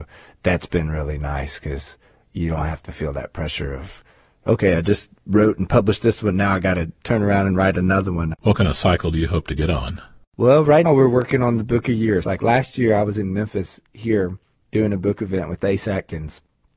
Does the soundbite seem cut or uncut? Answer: cut